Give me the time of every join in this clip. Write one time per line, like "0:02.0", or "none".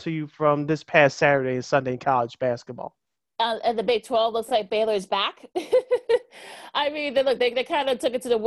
none